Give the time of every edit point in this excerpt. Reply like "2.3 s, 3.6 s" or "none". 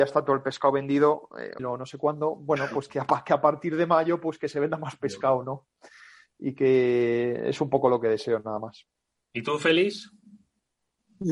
1.6 s